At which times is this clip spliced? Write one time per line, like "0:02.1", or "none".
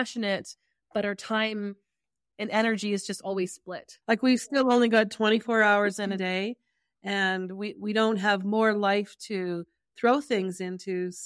0:04.0

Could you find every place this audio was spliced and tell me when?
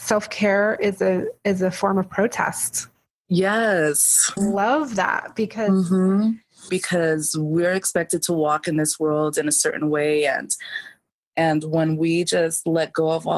0:04.4
0:06.7

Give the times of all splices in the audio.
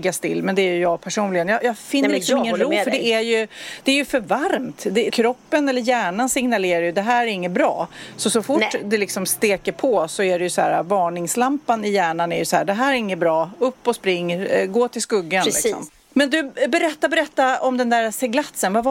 0:05.1

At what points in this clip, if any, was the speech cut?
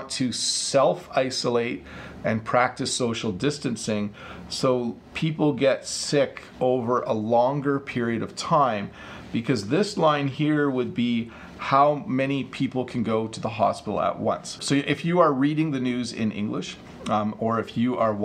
0:14.6

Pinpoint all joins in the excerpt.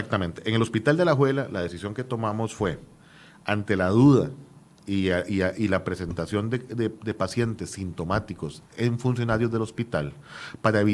none

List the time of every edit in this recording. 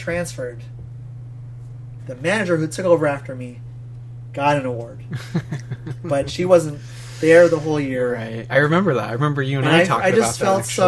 0:02.0

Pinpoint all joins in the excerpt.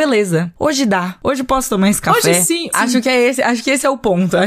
0:02.7

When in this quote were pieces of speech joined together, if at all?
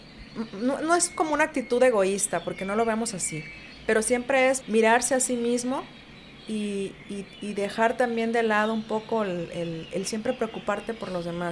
0:04.6
0:09.9

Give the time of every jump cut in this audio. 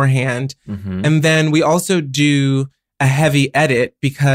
none

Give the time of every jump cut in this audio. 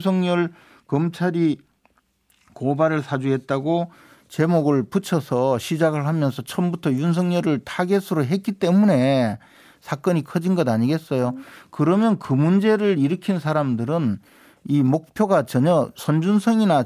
none

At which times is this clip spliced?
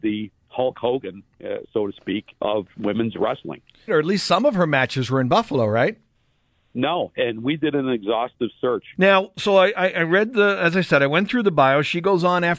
0:03.9
0:06.5
0:08.9

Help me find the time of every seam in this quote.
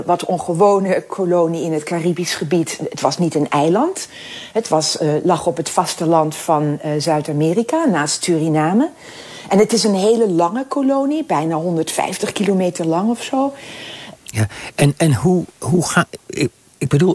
0:14.1

